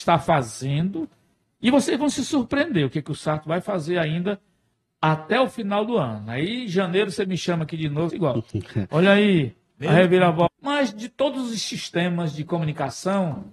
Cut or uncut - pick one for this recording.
cut